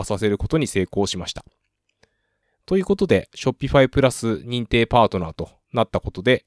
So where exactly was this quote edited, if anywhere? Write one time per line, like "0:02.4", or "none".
0:02.4